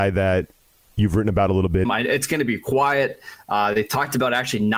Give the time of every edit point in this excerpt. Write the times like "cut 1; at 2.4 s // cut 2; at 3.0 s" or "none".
cut 1; at 1.9 s